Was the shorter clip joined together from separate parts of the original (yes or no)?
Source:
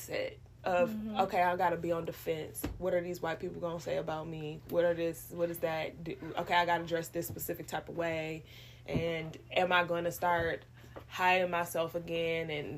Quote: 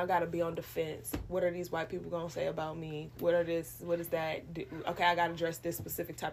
no